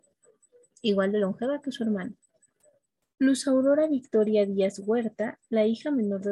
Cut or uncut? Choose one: uncut